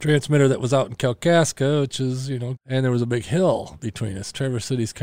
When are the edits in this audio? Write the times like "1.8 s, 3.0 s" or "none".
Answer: 2.5 s